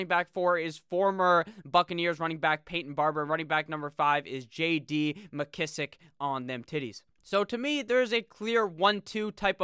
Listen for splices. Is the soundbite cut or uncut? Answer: cut